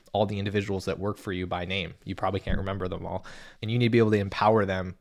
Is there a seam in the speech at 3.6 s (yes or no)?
yes